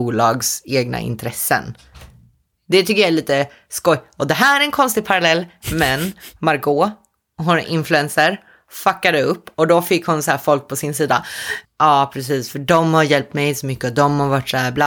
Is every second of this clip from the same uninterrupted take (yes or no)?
no